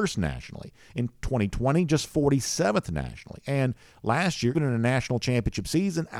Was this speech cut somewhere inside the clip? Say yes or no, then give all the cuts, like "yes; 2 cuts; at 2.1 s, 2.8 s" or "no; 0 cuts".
yes; 1 cut; at 4.5 s